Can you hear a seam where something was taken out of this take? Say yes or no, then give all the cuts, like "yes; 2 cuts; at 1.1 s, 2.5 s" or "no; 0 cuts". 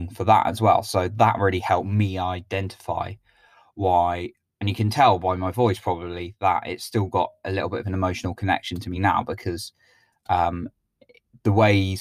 no; 0 cuts